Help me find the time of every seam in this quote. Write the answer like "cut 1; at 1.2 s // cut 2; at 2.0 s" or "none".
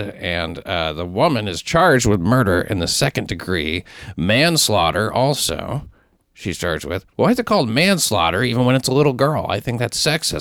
none